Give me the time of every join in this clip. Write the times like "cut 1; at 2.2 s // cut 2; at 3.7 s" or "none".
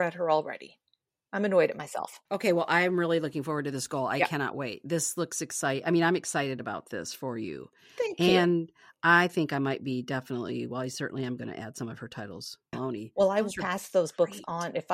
cut 1; at 2.3 s // cut 2; at 12.7 s